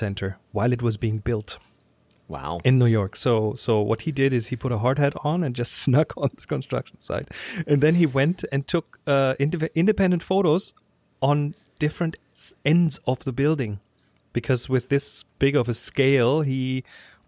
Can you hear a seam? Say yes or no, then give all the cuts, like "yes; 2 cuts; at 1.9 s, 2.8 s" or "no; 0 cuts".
no; 0 cuts